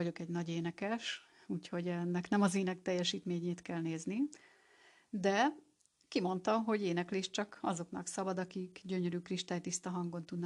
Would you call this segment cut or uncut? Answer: uncut